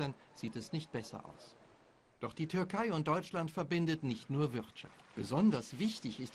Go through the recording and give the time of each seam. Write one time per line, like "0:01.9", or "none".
0:05.1